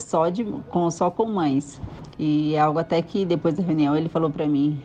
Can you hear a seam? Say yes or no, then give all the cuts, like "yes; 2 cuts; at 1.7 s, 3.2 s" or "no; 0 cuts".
no; 0 cuts